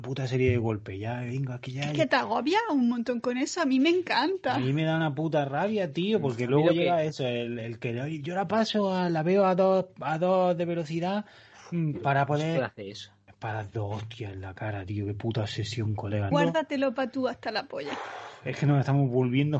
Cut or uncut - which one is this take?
cut